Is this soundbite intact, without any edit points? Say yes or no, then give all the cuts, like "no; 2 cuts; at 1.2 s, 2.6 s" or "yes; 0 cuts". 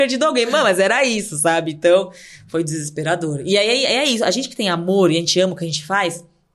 yes; 0 cuts